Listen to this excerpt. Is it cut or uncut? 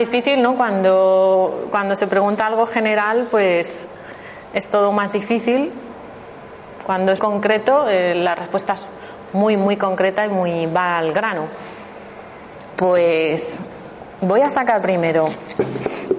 cut